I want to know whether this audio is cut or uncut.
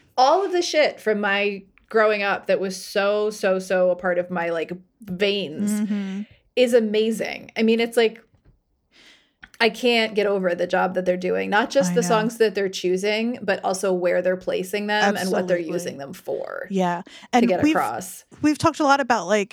uncut